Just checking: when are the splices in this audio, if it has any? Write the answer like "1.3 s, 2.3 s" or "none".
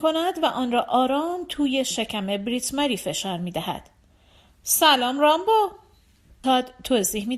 6.4 s